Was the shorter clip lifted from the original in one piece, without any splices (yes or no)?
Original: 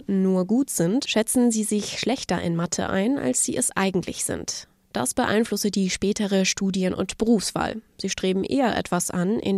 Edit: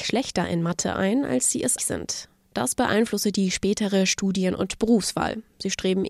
no